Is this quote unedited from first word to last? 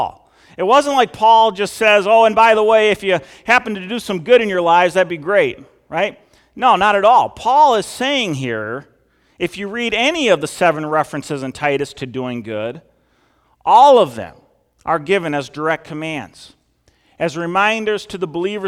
yes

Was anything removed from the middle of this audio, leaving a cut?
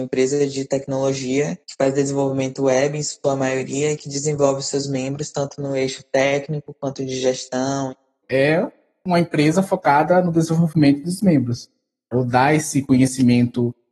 yes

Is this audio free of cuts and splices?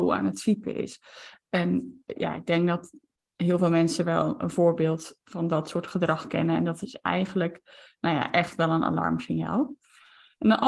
yes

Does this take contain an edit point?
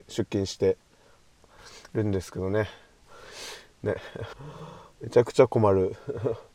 yes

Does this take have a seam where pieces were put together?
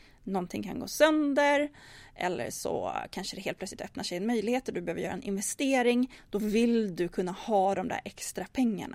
no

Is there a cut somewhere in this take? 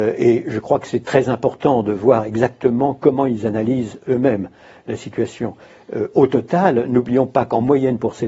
no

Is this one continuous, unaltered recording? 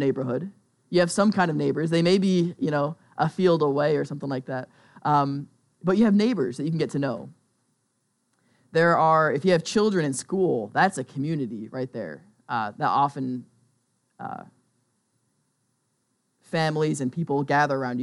yes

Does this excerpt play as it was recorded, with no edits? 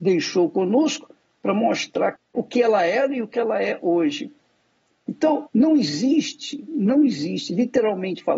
no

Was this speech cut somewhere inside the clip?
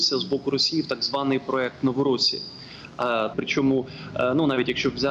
yes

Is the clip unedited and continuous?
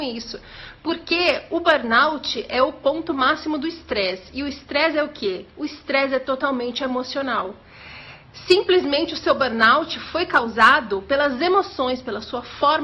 yes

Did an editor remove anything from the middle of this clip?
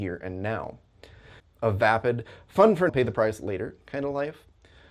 yes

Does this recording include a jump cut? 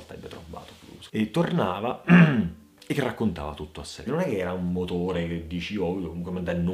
yes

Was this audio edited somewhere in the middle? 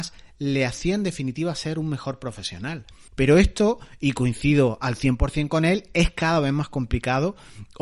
yes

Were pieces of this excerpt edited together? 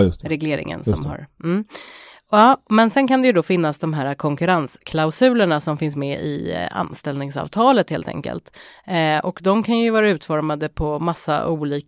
no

